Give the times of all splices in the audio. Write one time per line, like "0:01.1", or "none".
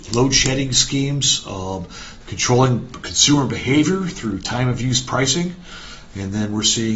0:02.2